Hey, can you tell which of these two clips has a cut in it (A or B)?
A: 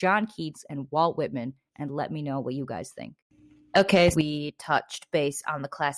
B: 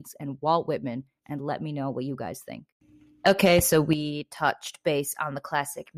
A